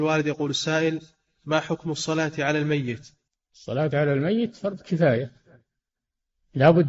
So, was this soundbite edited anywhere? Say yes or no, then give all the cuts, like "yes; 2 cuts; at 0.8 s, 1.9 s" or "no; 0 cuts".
no; 0 cuts